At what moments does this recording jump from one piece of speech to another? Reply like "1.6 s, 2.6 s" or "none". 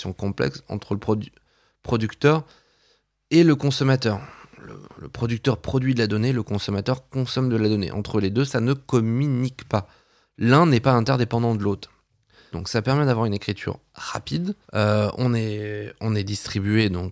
12.5 s, 14.6 s